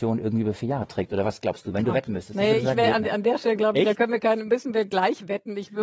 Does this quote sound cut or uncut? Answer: uncut